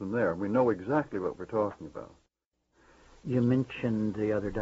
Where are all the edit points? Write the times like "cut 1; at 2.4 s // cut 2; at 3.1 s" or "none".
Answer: none